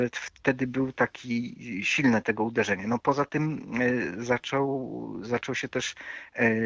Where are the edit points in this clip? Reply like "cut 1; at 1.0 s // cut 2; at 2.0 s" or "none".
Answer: none